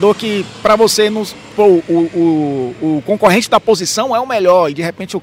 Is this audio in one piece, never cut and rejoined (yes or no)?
no